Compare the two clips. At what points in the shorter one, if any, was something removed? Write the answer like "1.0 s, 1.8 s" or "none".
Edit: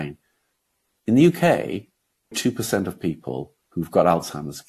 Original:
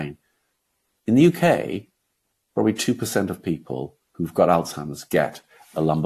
2.3 s